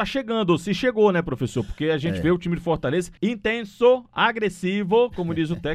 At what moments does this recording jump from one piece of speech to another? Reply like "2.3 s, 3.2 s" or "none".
3.2 s